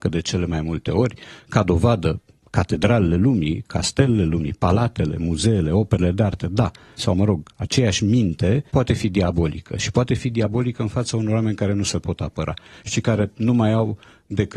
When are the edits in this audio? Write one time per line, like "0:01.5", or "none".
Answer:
0:07.0
0:08.7